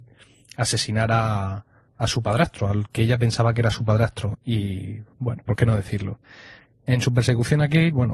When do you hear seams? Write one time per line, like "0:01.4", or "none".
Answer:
0:04.3
0:05.5

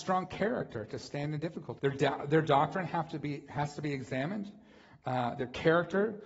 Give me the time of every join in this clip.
0:01.8

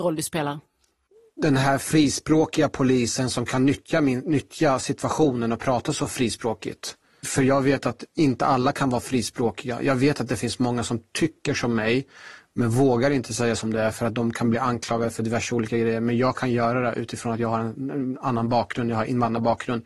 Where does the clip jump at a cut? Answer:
none

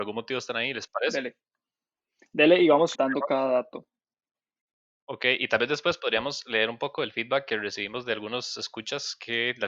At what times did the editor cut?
0:02.9

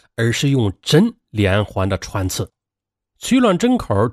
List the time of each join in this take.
none

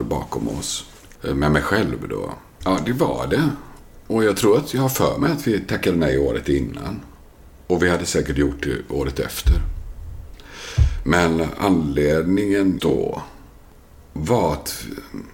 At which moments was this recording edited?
0:01.2
0:02.6
0:12.8

